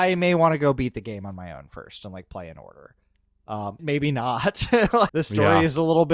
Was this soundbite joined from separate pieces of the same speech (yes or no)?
yes